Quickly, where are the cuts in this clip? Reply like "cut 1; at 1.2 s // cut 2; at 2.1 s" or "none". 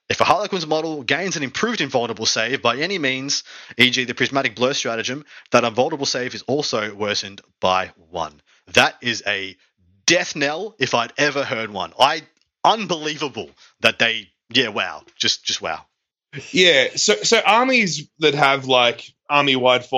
none